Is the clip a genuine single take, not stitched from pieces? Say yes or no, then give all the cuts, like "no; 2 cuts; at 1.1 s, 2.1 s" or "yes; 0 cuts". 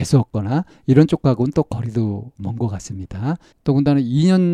no; 1 cut; at 3.5 s